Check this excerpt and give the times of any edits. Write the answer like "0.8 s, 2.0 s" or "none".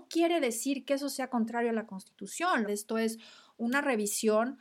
2.6 s